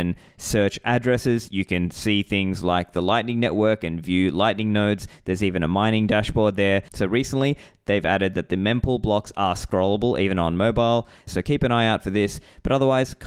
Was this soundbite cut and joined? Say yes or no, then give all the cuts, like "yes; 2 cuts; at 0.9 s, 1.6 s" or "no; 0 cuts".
yes; 2 cuts; at 6.9 s, 11.3 s